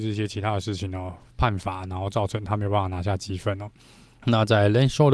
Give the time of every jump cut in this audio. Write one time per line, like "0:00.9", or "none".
0:04.2